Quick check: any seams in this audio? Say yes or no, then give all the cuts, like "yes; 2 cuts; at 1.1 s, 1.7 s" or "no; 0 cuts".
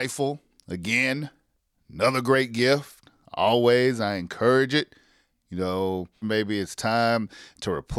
yes; 1 cut; at 6.2 s